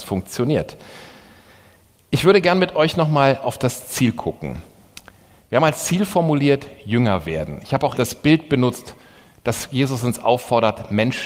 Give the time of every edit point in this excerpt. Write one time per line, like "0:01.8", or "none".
0:08.0